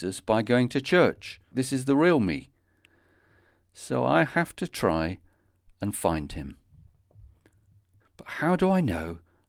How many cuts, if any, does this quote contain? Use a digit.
2